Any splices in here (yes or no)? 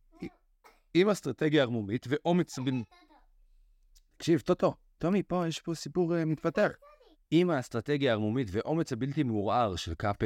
yes